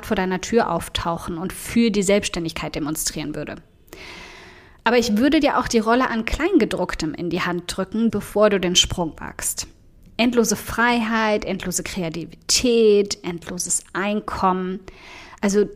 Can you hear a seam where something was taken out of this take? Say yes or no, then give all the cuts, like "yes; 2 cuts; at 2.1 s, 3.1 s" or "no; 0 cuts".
yes; 1 cut; at 8.1 s